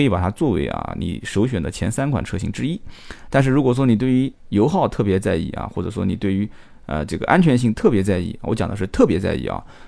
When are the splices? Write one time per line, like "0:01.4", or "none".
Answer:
none